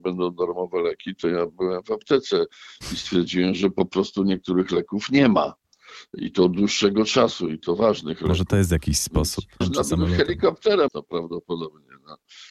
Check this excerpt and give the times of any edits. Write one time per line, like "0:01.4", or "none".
0:09.6
0:10.9